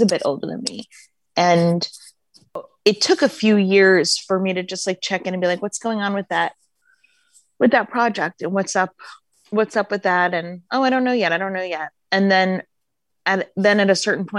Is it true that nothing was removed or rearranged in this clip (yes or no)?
no